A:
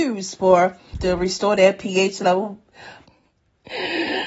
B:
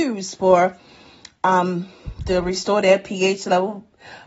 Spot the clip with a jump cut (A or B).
A